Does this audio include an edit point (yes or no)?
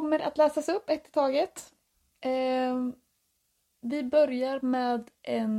no